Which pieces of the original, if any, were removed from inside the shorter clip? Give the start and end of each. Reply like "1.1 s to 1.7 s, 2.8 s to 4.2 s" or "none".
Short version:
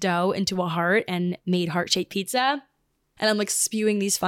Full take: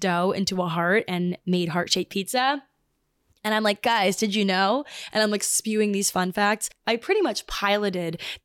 3.2 s to 5.1 s